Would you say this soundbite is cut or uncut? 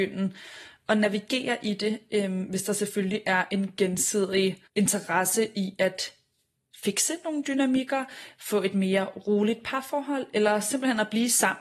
cut